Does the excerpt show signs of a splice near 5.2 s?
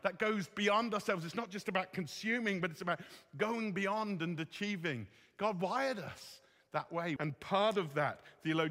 no; 1 cut; at 7.2 s

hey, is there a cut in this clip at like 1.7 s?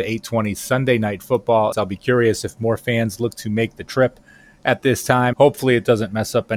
yes; 2 cuts; at 1.7 s, 5.3 s

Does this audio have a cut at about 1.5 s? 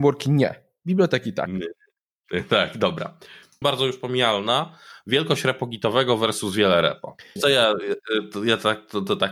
no; 2 cuts; at 3.6 s, 7.4 s

